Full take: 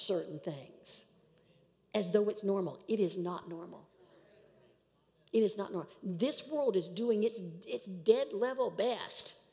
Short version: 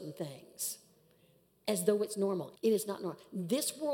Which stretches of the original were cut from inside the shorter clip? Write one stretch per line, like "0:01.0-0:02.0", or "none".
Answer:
0:02.8-0:05.3